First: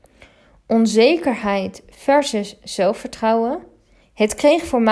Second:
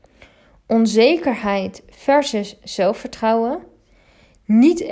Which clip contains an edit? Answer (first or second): first